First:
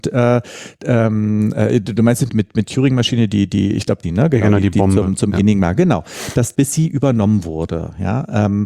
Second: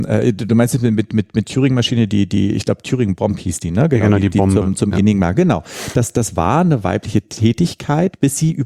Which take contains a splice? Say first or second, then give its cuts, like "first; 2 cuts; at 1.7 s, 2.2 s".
first; 3 cuts; at 2.3 s, 4.0 s, 6.5 s